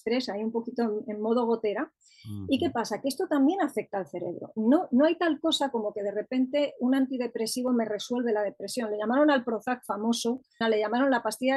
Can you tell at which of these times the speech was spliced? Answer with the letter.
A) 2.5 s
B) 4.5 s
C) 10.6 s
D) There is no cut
C